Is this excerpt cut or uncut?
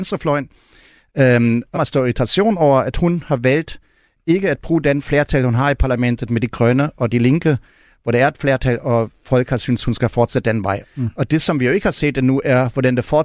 cut